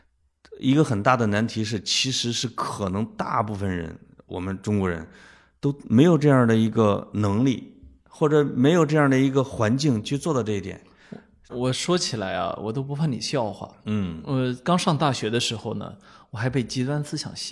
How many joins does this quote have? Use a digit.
1